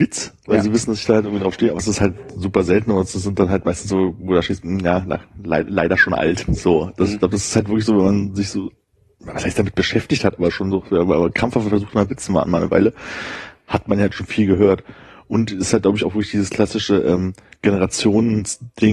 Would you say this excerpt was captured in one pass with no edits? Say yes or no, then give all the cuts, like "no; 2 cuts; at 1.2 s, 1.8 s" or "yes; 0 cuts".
yes; 0 cuts